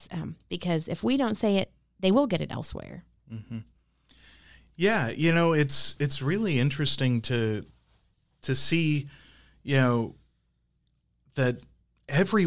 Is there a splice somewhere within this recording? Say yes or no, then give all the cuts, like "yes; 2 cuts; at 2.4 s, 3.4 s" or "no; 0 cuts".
no; 0 cuts